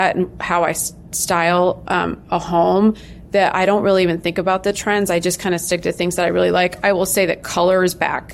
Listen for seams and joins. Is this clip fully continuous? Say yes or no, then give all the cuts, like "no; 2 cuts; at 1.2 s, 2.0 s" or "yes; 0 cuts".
yes; 0 cuts